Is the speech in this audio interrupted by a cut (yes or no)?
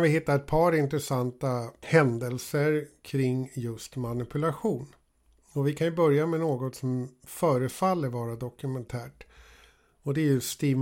no